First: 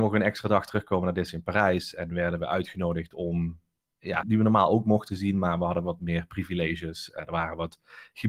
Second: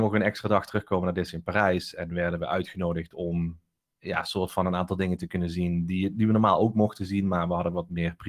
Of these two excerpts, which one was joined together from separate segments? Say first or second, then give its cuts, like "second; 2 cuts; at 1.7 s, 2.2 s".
first; 1 cut; at 4.2 s